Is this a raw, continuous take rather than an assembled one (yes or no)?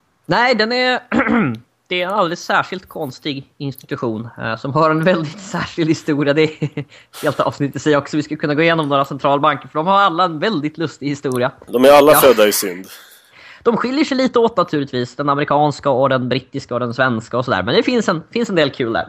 no